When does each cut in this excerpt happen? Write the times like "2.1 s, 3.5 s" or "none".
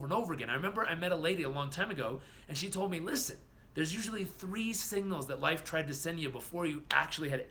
3.6 s